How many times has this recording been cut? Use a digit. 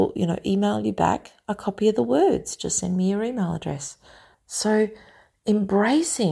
1